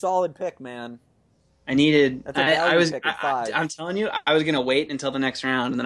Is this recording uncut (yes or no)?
yes